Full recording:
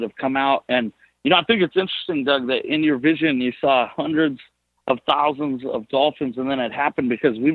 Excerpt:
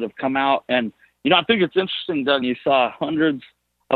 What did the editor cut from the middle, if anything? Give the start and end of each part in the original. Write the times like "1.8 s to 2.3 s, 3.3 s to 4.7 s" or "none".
2.4 s to 3.4 s

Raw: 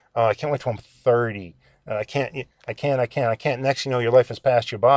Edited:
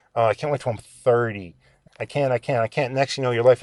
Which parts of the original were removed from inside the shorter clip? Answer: 1.9 s to 2.5 s

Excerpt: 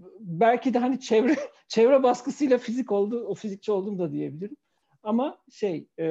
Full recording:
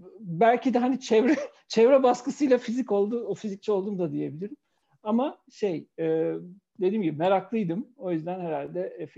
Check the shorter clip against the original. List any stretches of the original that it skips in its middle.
none

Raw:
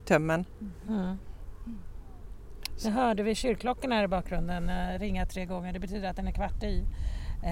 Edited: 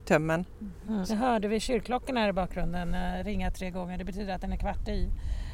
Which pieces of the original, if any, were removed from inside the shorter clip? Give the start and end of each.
1.0 s to 2.8 s

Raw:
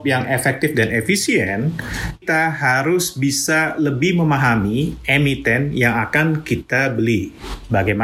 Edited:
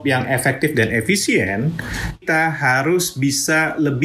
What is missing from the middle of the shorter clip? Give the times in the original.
none

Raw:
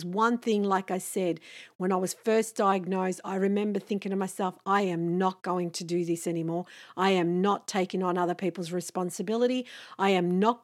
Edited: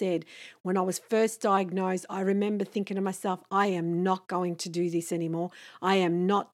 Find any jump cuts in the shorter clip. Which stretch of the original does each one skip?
none

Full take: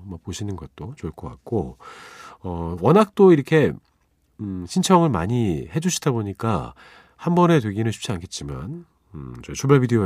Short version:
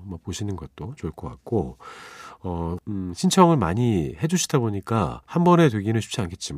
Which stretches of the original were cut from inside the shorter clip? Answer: 2.8 s to 4.3 s, 6.8 s to 7.1 s

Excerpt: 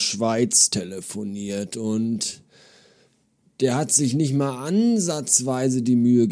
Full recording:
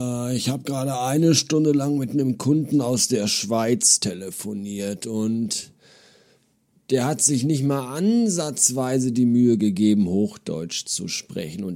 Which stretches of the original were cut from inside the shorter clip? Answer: none

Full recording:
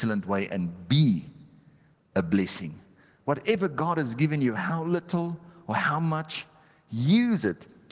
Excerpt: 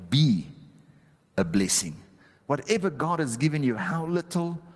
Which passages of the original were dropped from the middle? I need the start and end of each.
none

